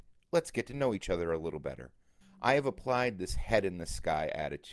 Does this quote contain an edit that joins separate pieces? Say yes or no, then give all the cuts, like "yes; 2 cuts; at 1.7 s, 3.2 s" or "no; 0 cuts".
yes; 1 cut; at 2.2 s